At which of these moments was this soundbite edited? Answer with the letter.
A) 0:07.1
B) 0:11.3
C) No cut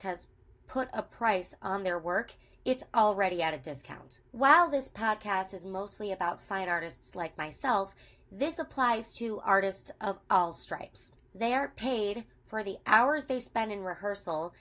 B